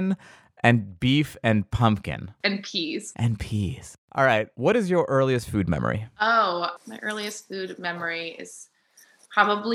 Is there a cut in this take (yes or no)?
yes